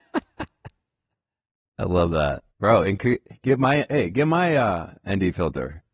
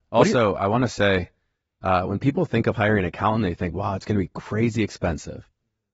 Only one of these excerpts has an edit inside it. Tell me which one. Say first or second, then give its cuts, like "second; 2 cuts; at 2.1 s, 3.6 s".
first; 1 cut; at 2.5 s